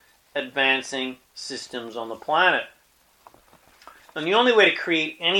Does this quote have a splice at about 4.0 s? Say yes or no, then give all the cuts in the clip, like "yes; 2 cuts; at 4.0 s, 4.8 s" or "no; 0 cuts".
yes; 1 cut; at 4.0 s